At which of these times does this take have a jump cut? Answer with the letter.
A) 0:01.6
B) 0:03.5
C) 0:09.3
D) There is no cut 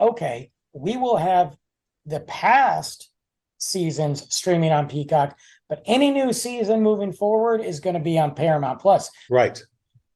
C